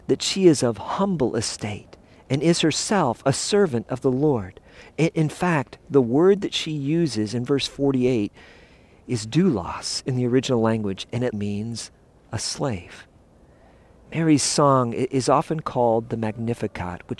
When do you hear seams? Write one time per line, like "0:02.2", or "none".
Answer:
0:11.3

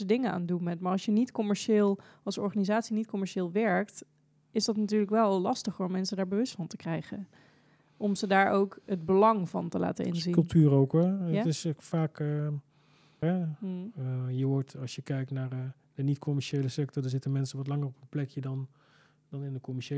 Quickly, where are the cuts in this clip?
0:13.2

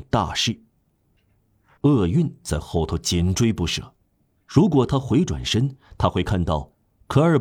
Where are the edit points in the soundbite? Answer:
0:01.7
0:04.4

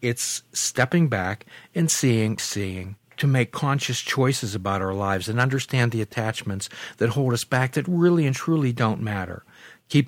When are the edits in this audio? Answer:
0:02.4

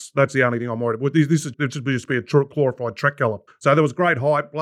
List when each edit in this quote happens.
0:01.5
0:03.5

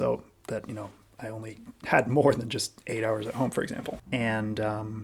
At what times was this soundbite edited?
0:04.1

